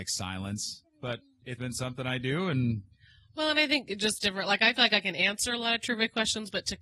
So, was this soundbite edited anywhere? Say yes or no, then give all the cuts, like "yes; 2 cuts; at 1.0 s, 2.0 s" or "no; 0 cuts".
yes; 1 cut; at 1.6 s